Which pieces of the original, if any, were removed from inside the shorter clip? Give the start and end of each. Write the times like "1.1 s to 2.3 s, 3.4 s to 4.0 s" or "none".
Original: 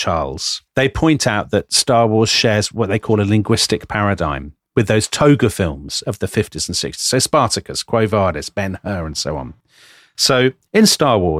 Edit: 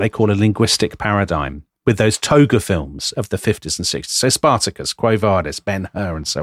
none